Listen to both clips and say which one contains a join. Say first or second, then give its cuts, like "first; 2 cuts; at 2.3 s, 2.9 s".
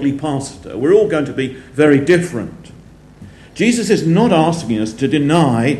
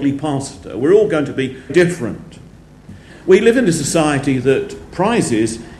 second; 2 cuts; at 1.7 s, 3.1 s